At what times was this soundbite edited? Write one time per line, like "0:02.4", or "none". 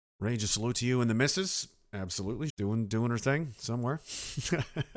0:02.5